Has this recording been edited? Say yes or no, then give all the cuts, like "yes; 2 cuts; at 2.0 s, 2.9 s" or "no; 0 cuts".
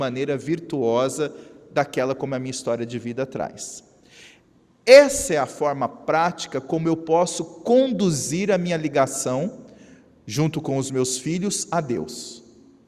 no; 0 cuts